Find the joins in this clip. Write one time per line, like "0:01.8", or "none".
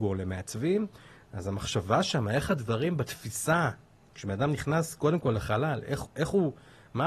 none

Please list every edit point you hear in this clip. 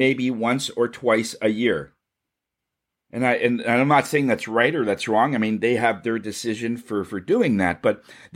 none

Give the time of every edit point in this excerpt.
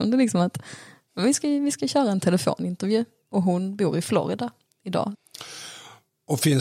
none

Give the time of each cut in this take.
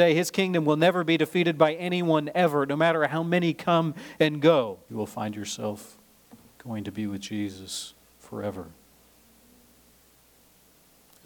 0:04.9

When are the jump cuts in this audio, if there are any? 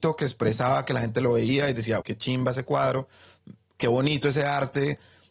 0:02.0

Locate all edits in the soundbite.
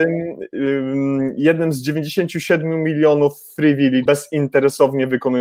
0:04.1

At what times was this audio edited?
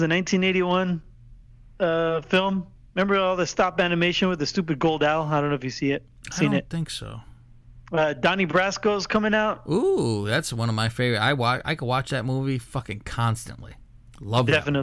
none

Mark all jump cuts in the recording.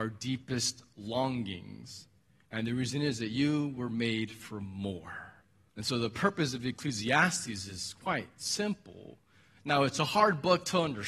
0:05.7

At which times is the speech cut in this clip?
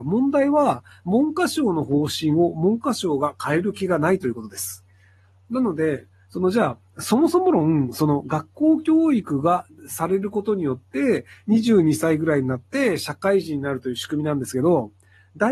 none

